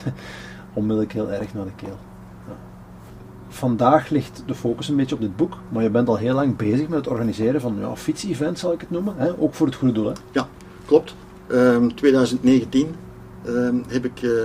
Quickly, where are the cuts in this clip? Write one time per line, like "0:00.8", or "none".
none